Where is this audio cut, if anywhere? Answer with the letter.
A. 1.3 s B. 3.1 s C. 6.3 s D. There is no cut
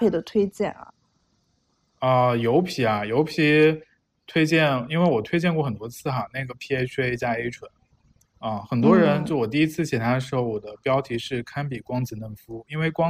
D